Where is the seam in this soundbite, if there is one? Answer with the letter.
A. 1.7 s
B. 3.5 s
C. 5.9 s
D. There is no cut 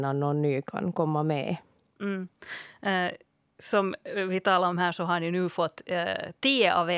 D